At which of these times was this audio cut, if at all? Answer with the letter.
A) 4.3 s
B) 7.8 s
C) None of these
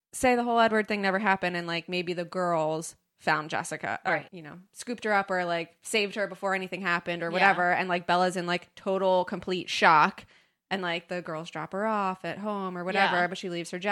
A